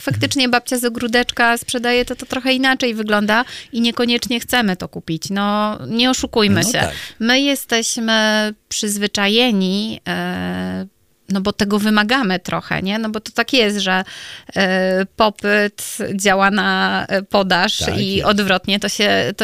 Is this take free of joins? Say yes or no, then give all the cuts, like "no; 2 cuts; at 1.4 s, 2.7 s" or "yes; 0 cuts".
yes; 0 cuts